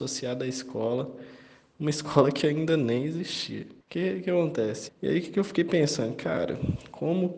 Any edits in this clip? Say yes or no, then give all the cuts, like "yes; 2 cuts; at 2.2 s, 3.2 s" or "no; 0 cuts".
yes; 2 cuts; at 3.8 s, 4.9 s